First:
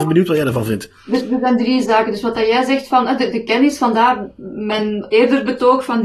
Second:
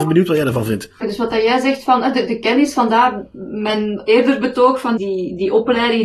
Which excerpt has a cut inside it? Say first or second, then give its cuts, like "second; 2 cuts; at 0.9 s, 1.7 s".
second; 2 cuts; at 1.0 s, 5.0 s